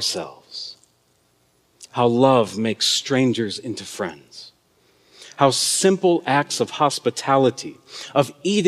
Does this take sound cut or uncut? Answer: uncut